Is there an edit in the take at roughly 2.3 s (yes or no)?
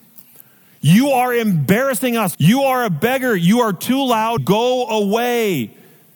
yes